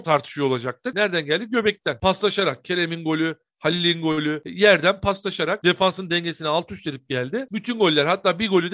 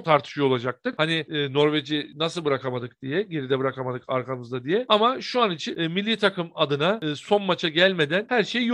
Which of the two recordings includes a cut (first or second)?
first